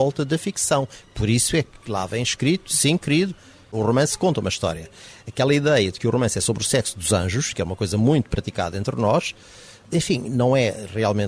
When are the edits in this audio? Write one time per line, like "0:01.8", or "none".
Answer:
none